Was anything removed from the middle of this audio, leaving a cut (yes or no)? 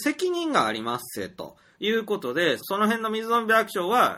yes